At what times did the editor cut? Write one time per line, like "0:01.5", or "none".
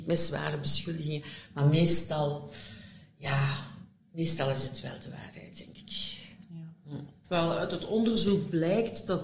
0:07.2